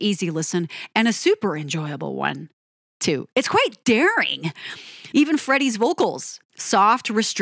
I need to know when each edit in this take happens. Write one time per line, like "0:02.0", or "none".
0:05.1
0:06.4